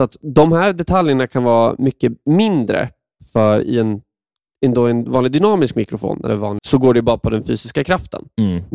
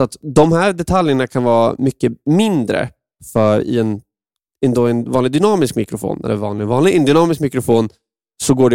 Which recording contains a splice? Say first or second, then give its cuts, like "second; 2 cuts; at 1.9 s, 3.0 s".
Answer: first; 1 cut; at 6.6 s